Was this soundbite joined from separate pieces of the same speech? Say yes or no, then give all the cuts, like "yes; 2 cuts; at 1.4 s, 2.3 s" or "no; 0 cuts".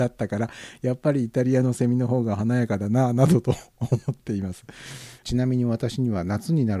yes; 1 cut; at 5.2 s